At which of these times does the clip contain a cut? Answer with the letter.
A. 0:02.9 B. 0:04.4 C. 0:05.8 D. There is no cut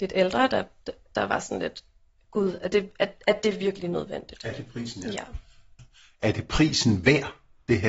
C